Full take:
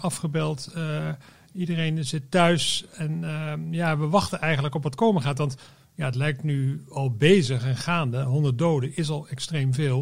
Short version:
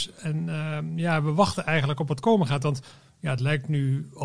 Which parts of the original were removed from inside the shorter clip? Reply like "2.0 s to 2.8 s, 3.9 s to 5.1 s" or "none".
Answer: none

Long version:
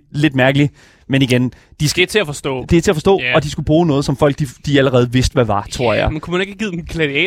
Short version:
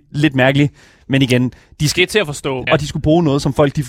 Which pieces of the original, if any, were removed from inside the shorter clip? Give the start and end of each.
2.7 s to 3.3 s

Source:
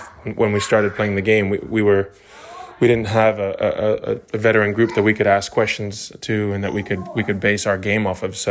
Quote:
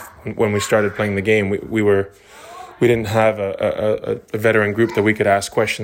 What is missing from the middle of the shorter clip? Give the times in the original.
none

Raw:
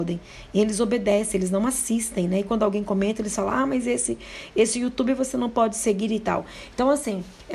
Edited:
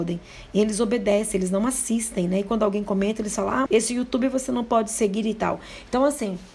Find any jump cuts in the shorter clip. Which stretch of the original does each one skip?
3.7 s to 4.5 s

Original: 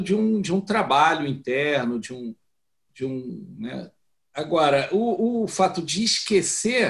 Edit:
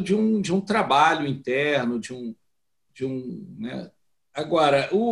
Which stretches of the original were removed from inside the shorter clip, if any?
none

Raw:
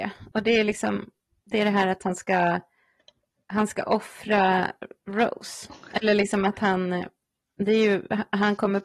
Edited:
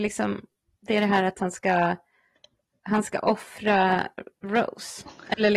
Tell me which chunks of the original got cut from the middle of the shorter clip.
none

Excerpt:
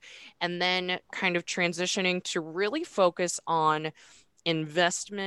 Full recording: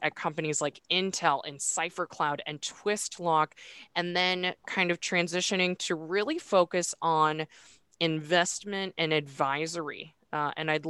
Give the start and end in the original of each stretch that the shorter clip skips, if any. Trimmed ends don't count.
none

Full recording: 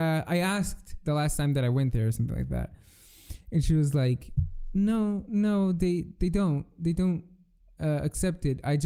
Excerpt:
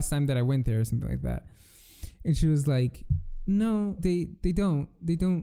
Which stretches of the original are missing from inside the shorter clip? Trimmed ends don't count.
5.3 s to 5.8 s

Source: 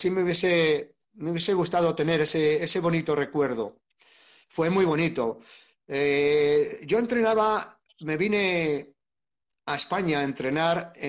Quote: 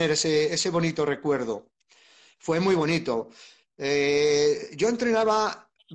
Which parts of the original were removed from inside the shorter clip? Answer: none

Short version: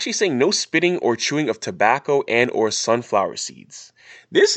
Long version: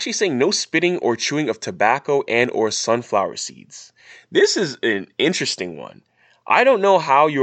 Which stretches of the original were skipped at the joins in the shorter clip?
none

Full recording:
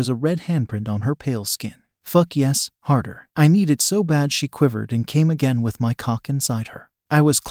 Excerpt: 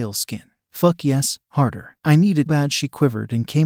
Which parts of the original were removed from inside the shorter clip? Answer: 3.8 s to 4.1 s

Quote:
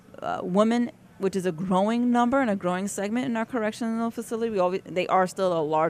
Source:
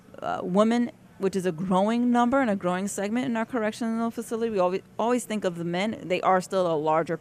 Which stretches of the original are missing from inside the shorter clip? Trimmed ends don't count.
4.9 s to 6.0 s

